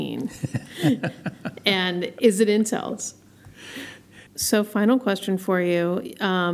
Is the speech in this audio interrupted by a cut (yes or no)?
yes